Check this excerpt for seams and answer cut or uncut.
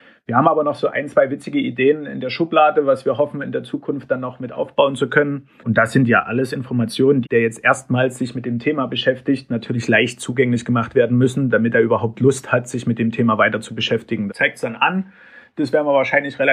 cut